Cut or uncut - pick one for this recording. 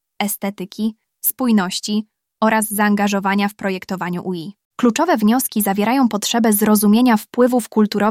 cut